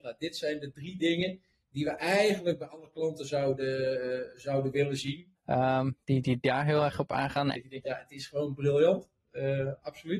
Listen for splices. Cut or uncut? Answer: cut